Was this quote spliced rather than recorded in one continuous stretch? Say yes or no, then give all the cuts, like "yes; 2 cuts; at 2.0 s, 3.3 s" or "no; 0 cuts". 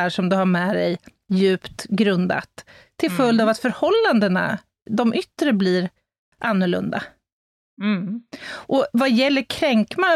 no; 0 cuts